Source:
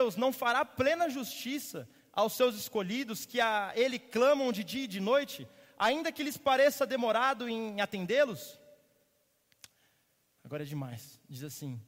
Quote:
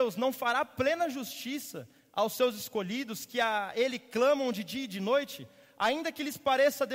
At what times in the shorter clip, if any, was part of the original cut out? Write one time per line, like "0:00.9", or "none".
none